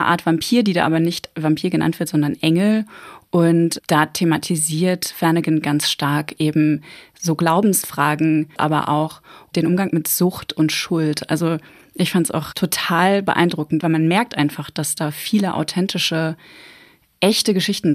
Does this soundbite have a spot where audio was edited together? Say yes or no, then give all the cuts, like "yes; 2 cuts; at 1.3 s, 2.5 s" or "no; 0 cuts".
yes; 2 cuts; at 8.6 s, 13.8 s